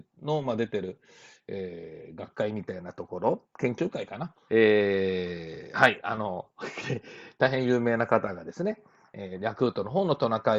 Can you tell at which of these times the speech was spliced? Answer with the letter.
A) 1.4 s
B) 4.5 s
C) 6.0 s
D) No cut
B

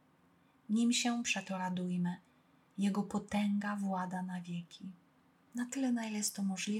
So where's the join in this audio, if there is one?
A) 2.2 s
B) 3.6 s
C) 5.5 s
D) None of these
C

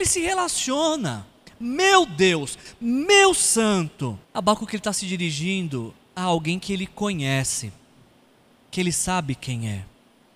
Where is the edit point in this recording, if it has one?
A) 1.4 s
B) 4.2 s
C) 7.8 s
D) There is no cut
B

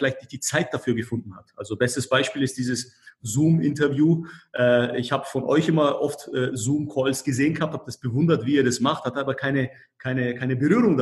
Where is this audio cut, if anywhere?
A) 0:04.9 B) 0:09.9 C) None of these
C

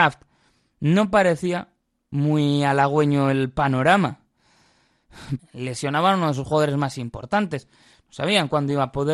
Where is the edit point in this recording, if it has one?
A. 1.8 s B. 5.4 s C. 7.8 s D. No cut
B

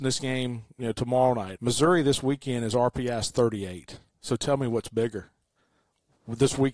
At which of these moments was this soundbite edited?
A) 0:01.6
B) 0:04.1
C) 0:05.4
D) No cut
A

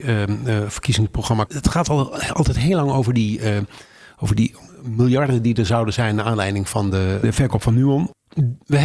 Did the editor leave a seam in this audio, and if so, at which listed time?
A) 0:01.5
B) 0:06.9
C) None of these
A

